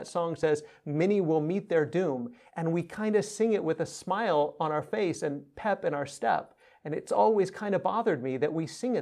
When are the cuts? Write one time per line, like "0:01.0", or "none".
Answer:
none